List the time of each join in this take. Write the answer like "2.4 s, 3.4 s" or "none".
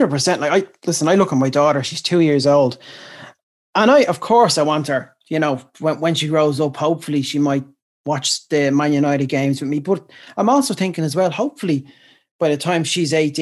none